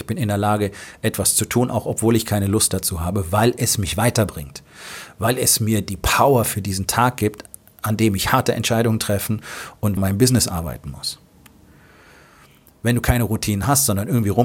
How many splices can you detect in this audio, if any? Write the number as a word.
one